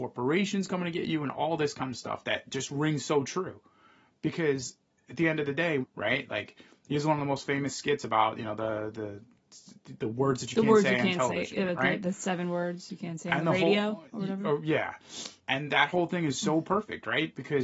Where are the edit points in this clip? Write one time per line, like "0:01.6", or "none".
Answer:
0:05.8